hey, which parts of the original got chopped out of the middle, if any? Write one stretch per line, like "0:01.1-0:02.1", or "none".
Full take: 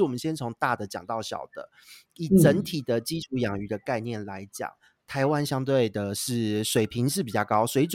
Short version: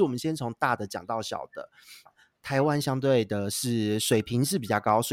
0:02.1-0:04.7